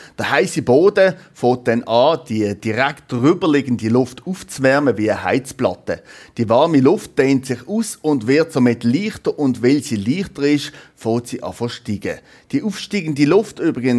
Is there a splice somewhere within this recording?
no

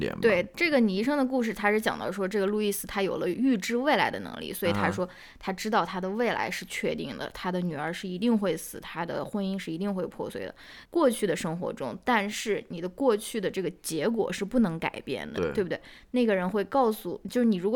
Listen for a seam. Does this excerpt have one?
yes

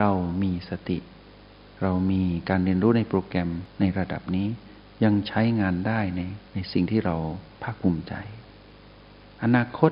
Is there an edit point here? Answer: yes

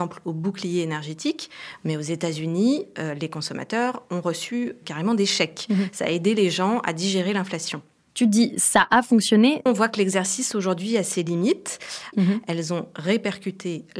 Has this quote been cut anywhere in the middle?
yes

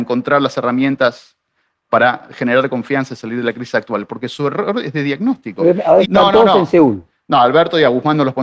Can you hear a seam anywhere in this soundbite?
yes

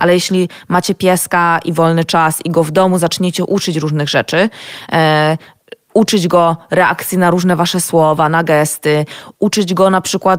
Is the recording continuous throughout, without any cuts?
yes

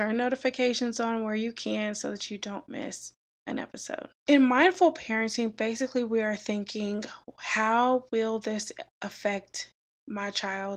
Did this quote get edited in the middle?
no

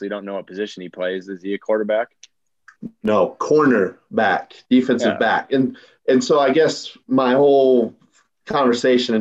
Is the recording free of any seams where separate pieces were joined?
yes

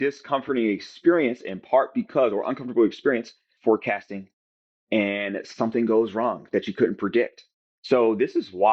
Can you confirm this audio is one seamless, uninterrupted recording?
no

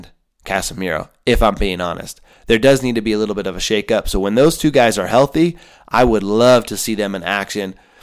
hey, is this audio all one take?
yes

